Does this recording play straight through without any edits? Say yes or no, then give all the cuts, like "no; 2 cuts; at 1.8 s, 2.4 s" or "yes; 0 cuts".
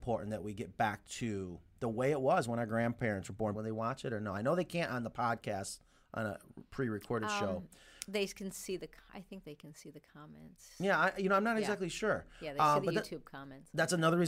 no; 1 cut; at 3.5 s